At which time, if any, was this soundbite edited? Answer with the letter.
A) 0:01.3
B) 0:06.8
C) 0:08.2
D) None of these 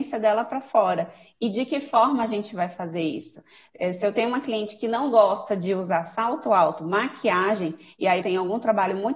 C